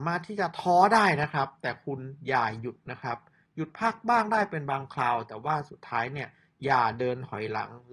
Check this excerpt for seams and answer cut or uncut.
uncut